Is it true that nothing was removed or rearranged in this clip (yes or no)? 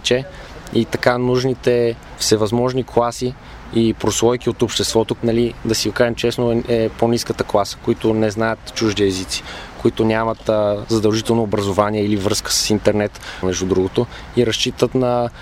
no